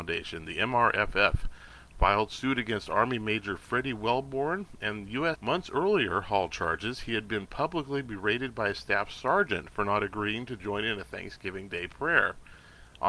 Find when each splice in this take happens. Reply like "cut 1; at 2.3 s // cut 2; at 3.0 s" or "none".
cut 1; at 5.4 s